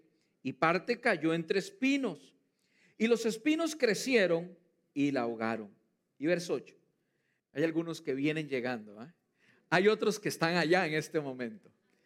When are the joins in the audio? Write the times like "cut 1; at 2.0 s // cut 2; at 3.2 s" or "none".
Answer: cut 1; at 7.4 s